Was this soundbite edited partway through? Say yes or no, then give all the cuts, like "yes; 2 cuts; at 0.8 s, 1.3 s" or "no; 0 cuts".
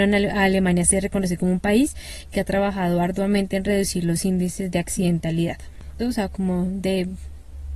yes; 1 cut; at 6.0 s